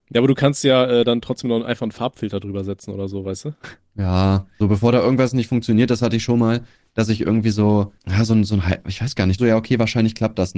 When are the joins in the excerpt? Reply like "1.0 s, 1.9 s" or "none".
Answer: 4.6 s, 8.0 s, 9.4 s